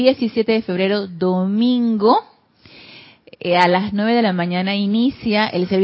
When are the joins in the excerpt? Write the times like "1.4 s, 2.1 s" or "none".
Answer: none